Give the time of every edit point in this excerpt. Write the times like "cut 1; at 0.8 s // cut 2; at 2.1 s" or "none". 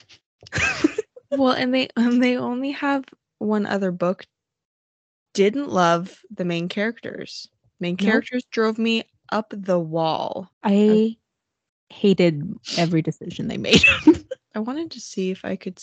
cut 1; at 5.3 s // cut 2; at 10.5 s // cut 3; at 14.5 s